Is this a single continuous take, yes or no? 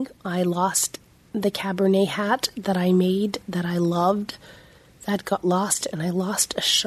yes